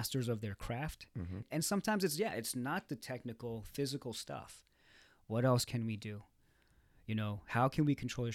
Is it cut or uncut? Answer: cut